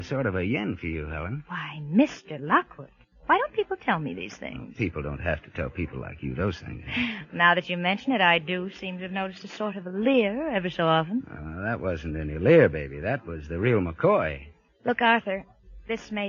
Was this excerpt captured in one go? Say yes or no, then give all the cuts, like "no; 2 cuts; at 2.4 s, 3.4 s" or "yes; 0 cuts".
yes; 0 cuts